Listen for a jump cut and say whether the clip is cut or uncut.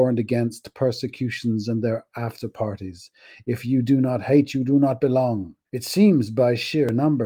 cut